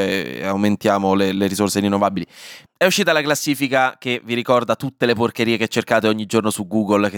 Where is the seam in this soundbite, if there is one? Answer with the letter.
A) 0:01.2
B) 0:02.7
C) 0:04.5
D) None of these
B